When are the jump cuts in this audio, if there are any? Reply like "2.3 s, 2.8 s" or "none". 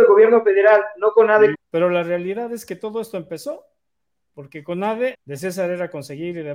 1.5 s, 5.1 s